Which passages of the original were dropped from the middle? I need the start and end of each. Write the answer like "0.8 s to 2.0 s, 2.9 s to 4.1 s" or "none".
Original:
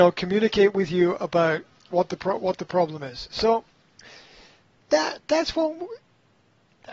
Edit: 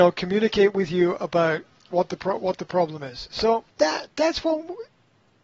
3.7 s to 4.8 s